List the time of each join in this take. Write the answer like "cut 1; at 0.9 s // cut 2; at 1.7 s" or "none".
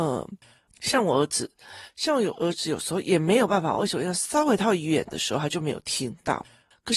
none